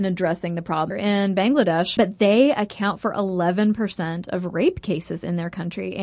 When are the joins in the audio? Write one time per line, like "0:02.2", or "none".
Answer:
0:00.9
0:02.0